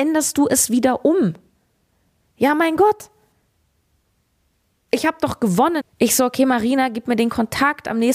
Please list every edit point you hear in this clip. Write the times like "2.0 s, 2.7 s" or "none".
2.2 s, 5.8 s